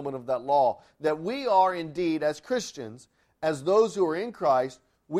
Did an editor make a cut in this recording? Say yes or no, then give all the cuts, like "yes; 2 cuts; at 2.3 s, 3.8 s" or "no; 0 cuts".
no; 0 cuts